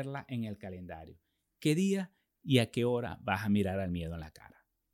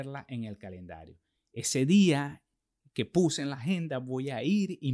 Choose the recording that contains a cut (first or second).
second